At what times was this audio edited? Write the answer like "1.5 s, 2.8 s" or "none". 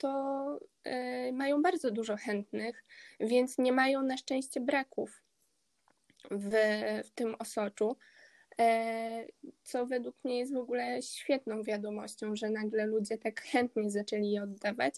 none